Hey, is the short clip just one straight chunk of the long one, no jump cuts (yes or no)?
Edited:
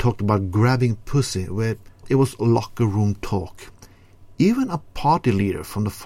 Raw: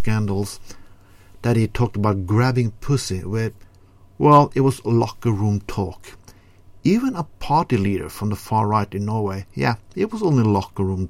no